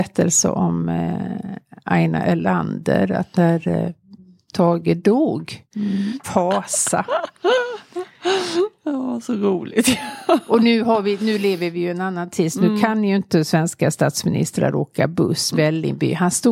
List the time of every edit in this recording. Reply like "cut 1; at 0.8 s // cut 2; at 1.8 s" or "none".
cut 1; at 6.2 s // cut 2; at 15.5 s